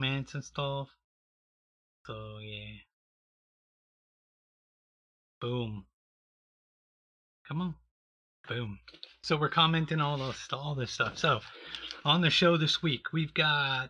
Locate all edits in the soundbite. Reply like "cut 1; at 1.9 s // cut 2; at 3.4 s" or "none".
none